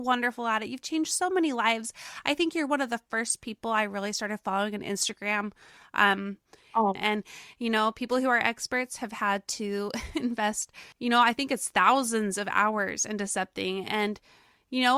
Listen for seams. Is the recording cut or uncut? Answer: cut